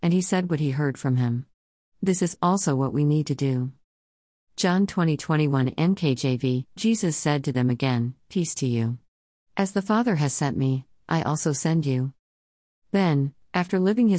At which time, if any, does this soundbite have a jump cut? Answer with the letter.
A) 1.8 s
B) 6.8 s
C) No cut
B